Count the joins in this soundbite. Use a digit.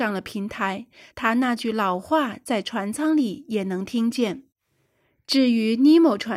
0